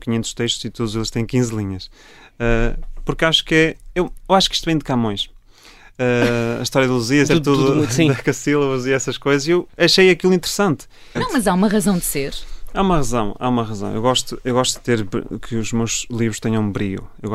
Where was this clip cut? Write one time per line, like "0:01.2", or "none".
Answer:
0:07.3
0:11.2